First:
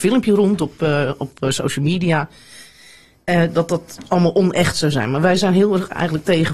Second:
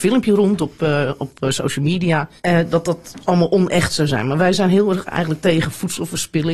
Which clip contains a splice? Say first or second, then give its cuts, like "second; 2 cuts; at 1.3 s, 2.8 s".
second; 1 cut; at 2.4 s